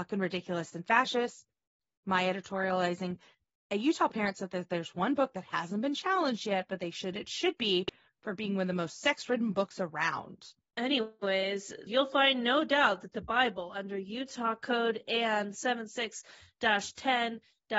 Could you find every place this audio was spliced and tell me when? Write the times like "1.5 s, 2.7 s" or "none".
10.7 s, 11.9 s